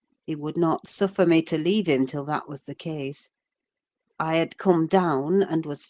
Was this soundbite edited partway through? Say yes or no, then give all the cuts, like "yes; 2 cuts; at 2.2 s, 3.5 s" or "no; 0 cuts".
no; 0 cuts